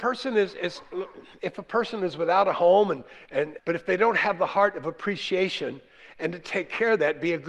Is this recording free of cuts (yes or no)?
no